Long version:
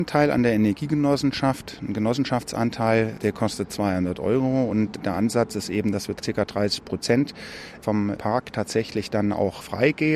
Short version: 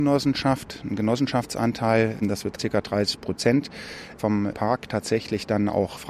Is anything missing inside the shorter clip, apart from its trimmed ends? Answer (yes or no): yes